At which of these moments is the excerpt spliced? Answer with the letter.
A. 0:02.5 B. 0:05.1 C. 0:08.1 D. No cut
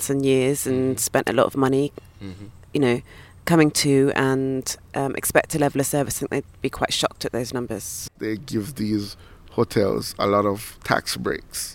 C